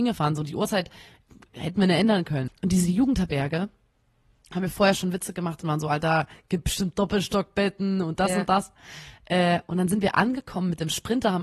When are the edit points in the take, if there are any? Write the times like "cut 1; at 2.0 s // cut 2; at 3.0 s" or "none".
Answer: cut 1; at 2.5 s